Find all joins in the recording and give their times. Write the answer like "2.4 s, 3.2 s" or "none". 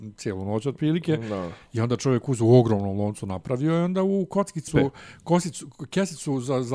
4.7 s